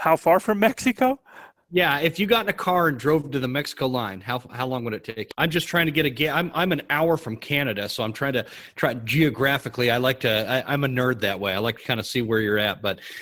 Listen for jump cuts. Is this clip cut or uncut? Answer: cut